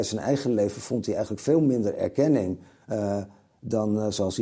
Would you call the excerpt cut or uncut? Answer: uncut